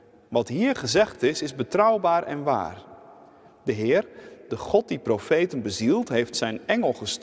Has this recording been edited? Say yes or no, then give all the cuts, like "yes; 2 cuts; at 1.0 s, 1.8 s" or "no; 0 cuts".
no; 0 cuts